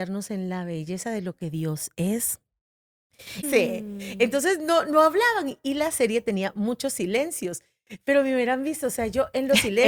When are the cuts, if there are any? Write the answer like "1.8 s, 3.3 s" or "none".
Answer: 3.4 s